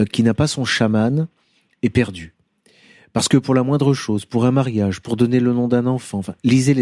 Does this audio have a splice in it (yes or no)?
no